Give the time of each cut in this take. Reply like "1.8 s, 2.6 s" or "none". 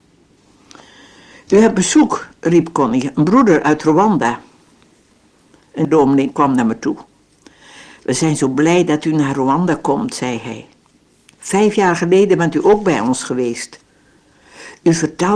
none